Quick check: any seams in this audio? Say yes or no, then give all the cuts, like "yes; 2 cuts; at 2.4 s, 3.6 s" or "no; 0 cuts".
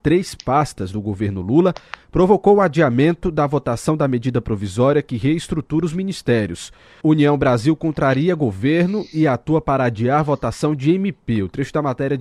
yes; 1 cut; at 7.0 s